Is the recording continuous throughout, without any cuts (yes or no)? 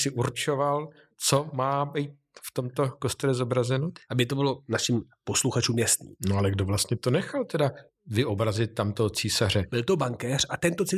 no